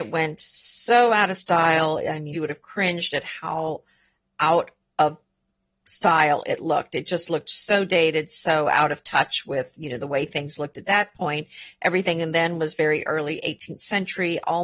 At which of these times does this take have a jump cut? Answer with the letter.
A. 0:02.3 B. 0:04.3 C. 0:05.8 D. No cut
A